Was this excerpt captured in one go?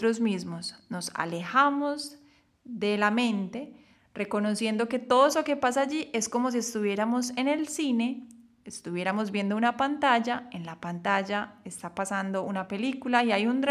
yes; 0 cuts

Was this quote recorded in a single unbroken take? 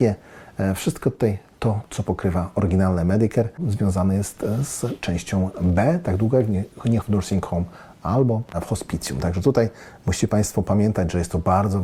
no; 1 cut; at 7.0 s

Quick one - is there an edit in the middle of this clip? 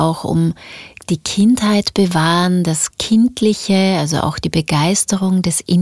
no; 0 cuts

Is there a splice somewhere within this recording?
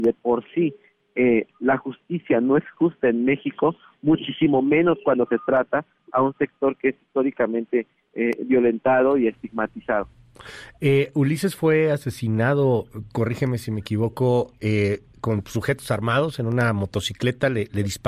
no; 0 cuts

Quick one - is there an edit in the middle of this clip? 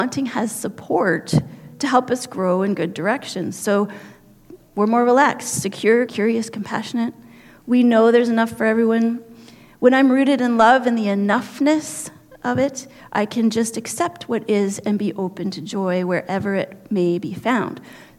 yes; 1 cut; at 6.1 s

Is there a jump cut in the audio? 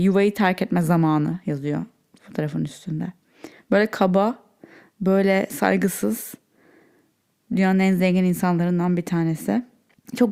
no; 0 cuts

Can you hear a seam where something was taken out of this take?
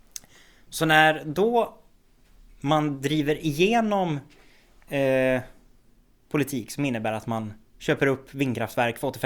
no; 0 cuts

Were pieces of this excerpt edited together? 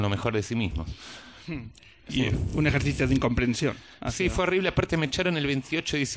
no; 0 cuts

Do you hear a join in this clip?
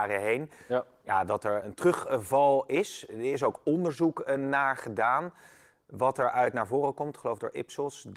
yes; 1 cut; at 1.6 s

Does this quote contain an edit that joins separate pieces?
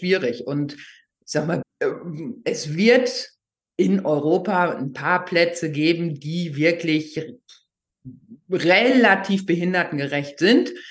yes; 1 cut; at 1.6 s

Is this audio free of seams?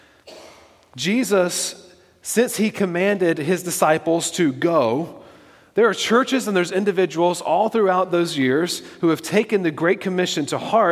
yes; 0 cuts

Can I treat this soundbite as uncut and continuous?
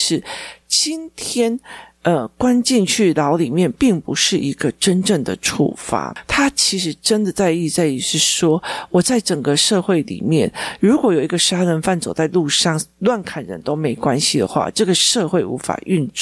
yes; 0 cuts

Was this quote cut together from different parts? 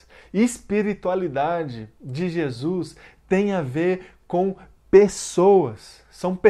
no; 0 cuts

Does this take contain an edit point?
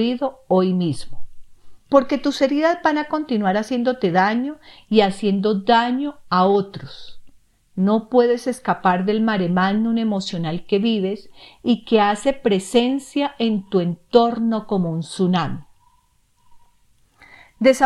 no; 0 cuts

